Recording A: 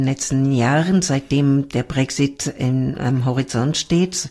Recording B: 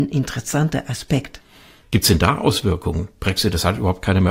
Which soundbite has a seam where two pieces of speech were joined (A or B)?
B